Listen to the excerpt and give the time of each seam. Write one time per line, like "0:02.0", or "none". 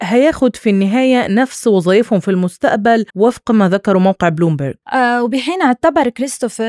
0:03.1
0:04.8